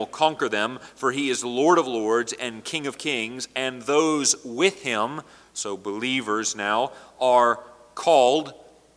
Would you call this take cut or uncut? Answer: uncut